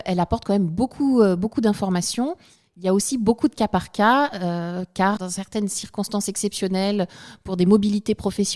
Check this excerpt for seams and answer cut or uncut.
cut